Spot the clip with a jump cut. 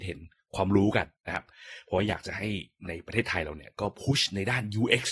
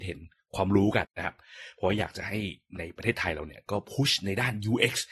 second; 1 cut; at 1.0 s

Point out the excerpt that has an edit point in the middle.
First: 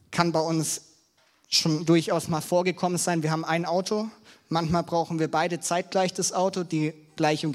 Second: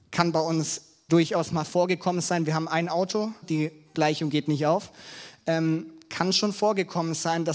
second; 2 cuts; at 1.1 s, 3.4 s

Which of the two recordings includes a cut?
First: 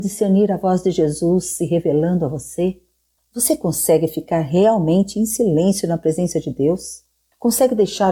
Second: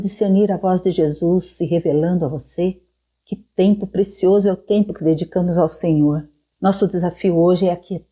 first; 1 cut; at 3.2 s

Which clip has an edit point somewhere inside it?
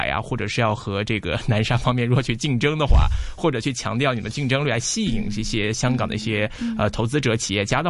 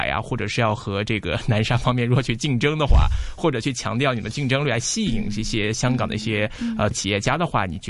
second; 1 cut; at 6.9 s

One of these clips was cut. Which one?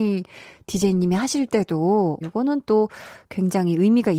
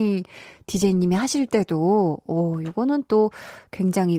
first; 1 cut; at 2.2 s

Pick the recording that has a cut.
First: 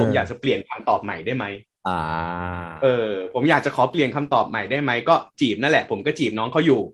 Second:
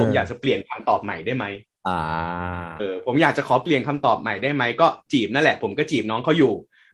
second; 1 cut; at 2.8 s

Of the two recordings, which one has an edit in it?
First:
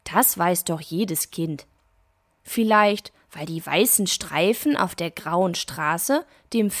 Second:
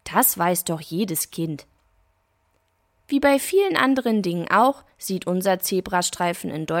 first; 1 cut; at 2.3 s

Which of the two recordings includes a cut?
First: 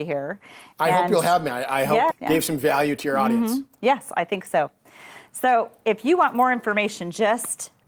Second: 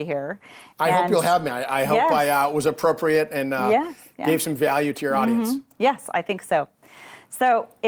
first; 1 cut; at 2.1 s

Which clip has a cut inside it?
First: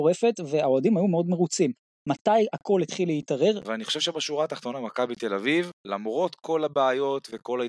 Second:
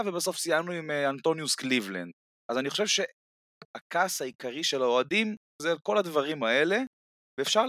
first; 2 cuts; at 3.6 s, 5.8 s

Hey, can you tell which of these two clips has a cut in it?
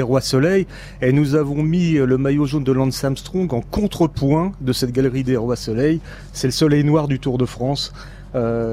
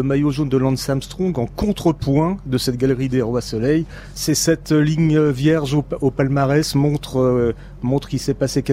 second; 1 cut; at 4.1 s

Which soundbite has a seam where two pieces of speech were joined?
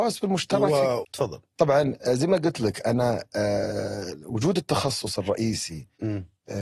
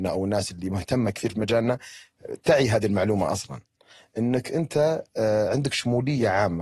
first; 1 cut; at 1.0 s

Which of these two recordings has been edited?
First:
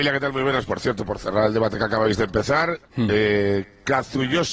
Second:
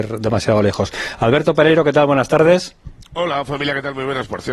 first; 1 cut; at 2.9 s

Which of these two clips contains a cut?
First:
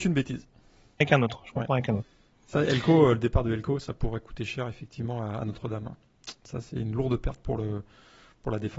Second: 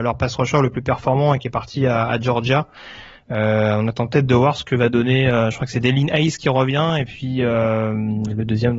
first; 1 cut; at 1.0 s

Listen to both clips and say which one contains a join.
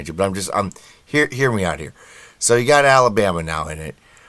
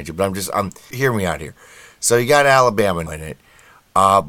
second; 2 cuts; at 0.9 s, 3.1 s

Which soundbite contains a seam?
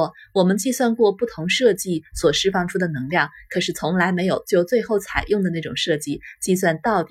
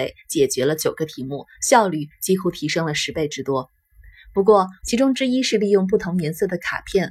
second; 1 cut; at 4.8 s

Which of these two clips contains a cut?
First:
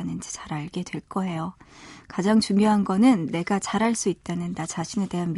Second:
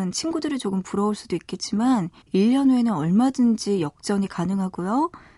second; 1 cut; at 2.2 s

